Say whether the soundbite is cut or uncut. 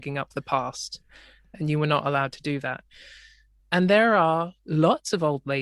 cut